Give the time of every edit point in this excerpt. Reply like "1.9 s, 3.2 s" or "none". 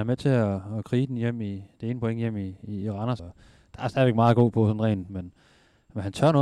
3.2 s, 5.1 s